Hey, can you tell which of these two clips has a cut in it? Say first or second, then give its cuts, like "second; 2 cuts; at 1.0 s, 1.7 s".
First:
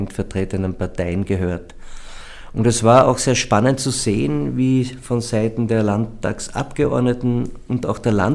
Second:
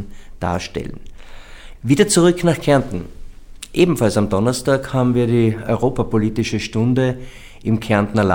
second; 1 cut; at 1.7 s